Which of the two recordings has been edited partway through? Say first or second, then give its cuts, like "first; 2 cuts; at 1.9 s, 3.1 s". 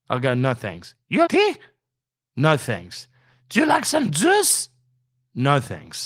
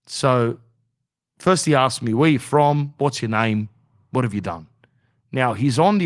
first; 1 cut; at 1.3 s